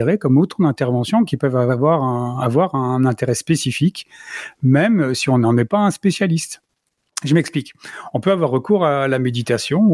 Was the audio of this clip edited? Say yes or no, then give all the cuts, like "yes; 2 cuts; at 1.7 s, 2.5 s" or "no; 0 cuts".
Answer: no; 0 cuts